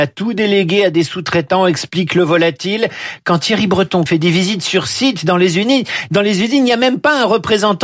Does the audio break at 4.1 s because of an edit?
yes; 1 cut; at 4.1 s

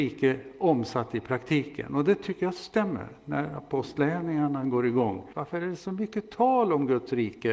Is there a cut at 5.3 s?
yes; 1 cut; at 5.3 s

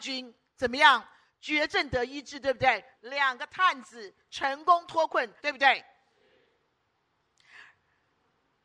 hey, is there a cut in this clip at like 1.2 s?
no; 2 cuts; at 2.9 s, 5.4 s

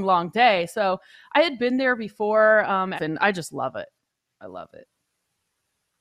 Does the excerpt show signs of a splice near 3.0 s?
yes; 1 cut; at 3.0 s

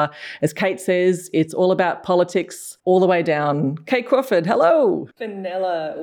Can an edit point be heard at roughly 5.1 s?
yes; 1 cut; at 5.1 s

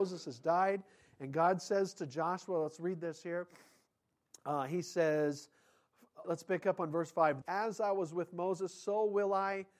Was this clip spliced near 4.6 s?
no; 2 cuts; at 6.2 s, 7.4 s

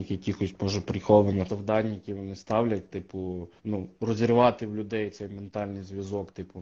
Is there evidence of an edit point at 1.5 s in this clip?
yes; 2 cuts; at 1.5 s, 3.6 s

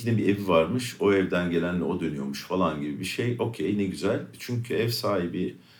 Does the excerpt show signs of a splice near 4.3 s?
yes; 1 cut; at 4.3 s

